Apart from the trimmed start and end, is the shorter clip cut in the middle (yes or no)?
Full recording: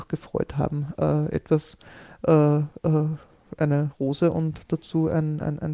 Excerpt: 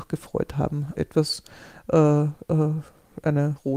yes